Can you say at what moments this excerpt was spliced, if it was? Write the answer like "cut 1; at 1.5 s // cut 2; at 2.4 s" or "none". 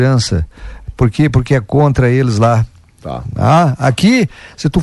none